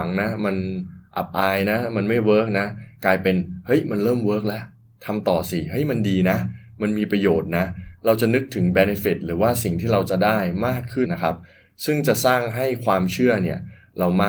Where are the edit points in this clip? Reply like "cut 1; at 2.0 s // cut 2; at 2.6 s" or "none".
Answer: cut 1; at 11.1 s